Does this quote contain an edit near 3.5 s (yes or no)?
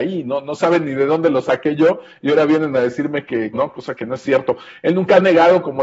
yes